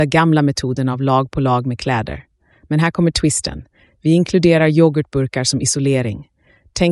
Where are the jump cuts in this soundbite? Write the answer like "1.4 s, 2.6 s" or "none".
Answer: none